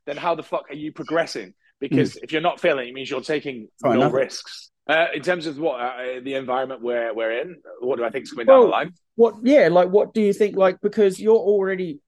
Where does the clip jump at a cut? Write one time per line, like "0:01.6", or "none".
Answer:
0:04.7

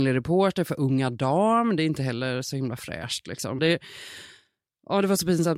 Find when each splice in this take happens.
0:03.6

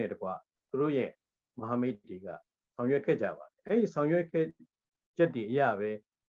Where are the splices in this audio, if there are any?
none

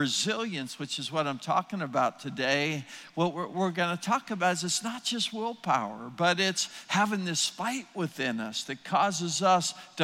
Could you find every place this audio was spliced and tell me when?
none

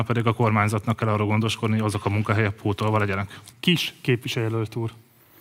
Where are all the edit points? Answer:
0:03.5

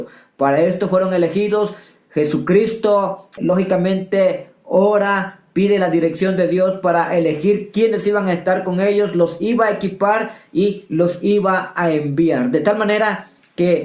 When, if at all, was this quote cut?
0:03.4

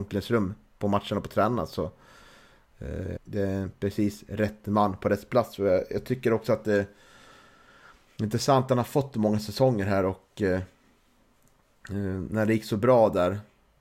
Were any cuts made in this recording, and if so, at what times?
0:03.2

